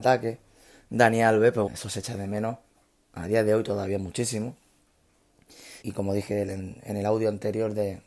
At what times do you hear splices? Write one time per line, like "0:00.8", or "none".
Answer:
0:01.7
0:05.8